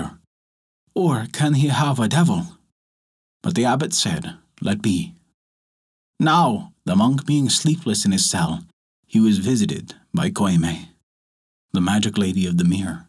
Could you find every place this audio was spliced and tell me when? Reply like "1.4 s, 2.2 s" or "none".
6.7 s